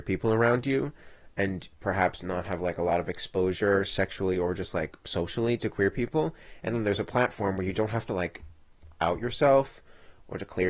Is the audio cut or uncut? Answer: uncut